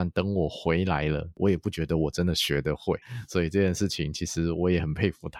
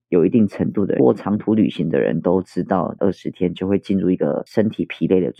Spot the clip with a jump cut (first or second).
second